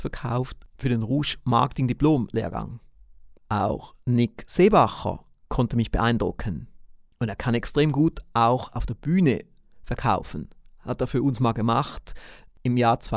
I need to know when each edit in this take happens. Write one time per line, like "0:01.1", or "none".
0:03.4
0:07.1